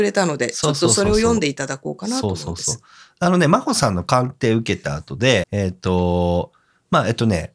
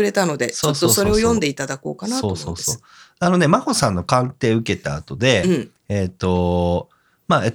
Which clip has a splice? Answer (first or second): first